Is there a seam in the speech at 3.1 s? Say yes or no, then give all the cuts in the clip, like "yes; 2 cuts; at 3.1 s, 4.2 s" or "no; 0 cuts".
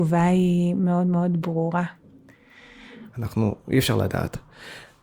yes; 1 cut; at 3.1 s